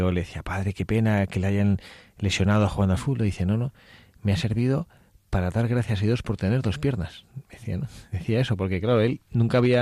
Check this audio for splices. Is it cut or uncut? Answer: uncut